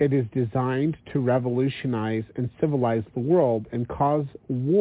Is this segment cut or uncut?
uncut